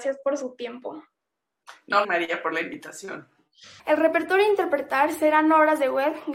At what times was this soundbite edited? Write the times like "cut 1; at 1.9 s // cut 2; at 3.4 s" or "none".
cut 1; at 2.0 s // cut 2; at 3.8 s